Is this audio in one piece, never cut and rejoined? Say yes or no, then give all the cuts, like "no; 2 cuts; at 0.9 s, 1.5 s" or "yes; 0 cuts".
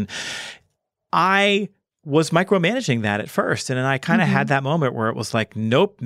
yes; 0 cuts